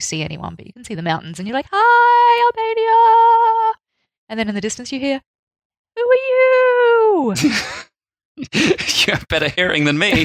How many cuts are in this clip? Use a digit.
0